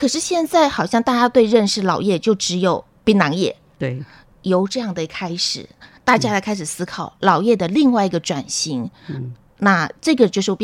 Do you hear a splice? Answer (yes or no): no